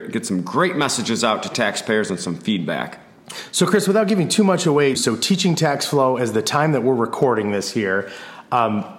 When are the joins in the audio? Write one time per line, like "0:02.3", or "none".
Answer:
0:04.9